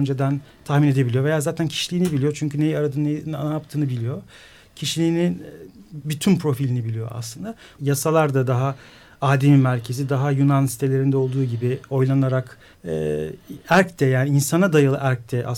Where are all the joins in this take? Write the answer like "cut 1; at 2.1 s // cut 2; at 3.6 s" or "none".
cut 1; at 7.8 s // cut 2; at 12.7 s